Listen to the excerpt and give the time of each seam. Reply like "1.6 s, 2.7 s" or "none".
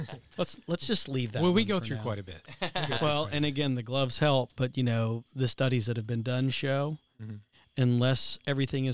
none